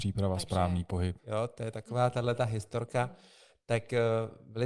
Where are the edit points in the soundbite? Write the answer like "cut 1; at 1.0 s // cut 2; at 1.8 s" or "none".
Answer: cut 1; at 1.2 s